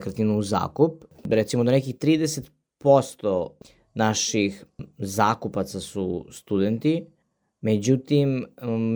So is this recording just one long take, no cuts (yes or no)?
no